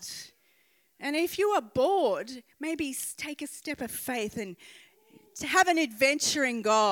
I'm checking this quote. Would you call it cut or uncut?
uncut